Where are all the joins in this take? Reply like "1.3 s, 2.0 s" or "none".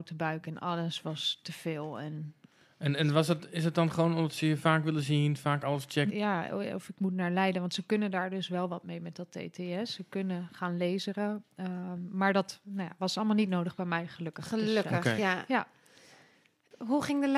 6.1 s